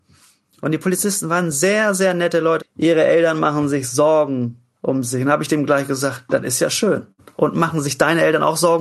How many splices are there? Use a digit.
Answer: 1